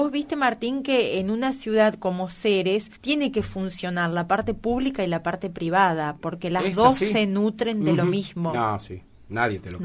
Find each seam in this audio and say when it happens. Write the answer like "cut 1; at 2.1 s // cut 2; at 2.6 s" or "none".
cut 1; at 3.0 s // cut 2; at 8.5 s